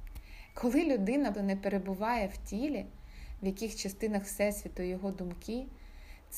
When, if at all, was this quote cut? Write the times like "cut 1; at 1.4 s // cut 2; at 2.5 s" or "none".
cut 1; at 1.3 s // cut 2; at 3.4 s